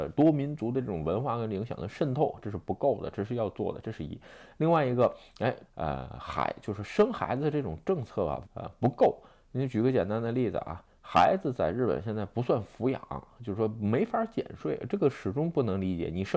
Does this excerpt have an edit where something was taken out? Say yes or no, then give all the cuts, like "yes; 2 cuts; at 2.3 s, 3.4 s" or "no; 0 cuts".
yes; 2 cuts; at 5.7 s, 8.4 s